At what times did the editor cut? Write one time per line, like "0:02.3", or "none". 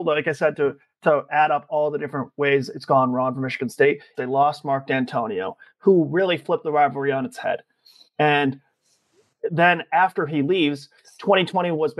0:04.1